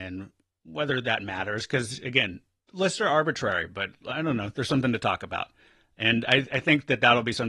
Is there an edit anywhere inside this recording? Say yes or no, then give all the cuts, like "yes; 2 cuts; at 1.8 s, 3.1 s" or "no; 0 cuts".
no; 0 cuts